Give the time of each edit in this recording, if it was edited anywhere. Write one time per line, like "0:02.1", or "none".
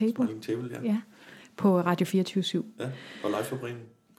none